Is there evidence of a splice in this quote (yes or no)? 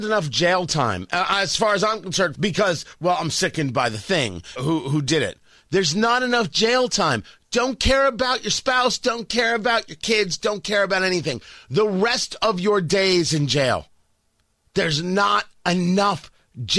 yes